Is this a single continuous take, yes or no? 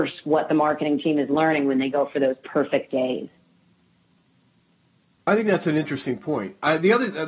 yes